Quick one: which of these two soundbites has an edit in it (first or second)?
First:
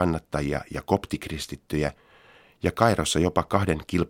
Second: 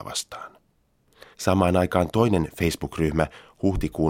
second